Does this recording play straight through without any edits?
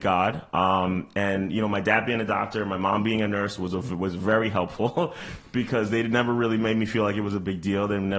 yes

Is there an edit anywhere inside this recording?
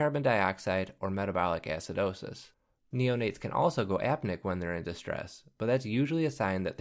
no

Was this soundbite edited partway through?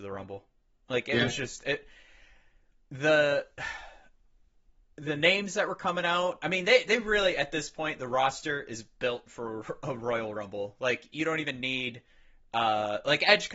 no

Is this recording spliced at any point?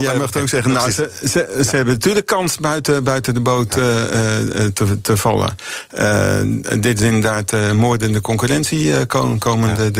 no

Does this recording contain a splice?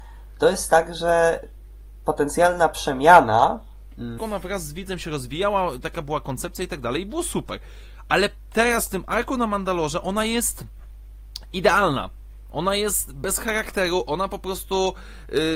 yes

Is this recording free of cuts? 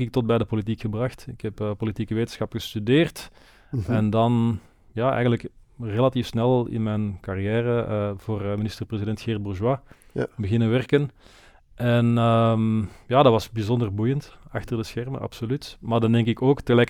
yes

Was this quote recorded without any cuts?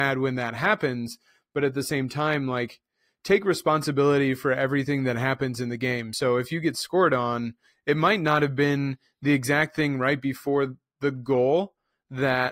yes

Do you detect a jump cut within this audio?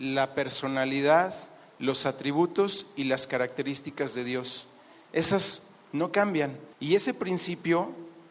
yes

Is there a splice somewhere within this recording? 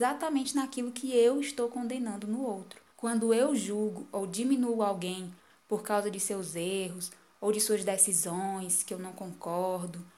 yes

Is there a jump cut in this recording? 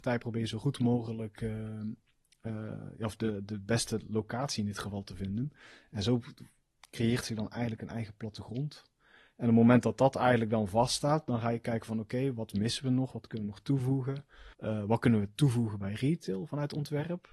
yes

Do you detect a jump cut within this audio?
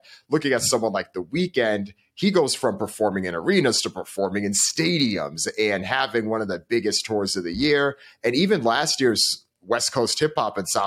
no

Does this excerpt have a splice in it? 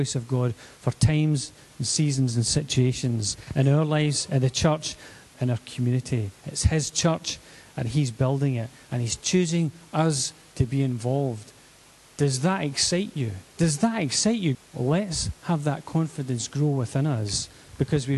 yes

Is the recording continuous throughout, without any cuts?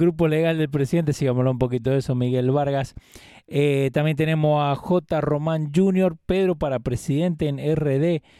yes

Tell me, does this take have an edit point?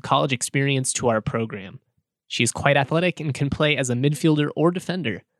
no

